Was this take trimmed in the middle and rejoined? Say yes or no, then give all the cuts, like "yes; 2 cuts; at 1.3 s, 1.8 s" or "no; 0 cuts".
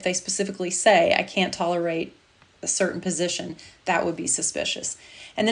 no; 0 cuts